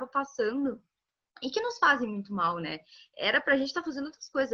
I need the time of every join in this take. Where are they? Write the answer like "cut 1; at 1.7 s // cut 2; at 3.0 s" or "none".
none